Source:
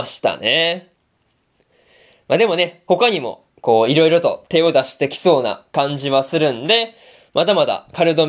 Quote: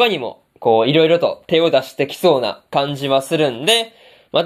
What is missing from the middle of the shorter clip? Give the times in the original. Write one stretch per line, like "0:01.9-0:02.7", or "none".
none